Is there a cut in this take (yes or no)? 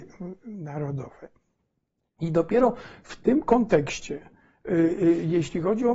no